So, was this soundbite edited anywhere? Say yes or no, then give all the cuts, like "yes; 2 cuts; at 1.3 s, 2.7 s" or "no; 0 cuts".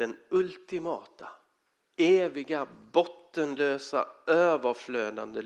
no; 0 cuts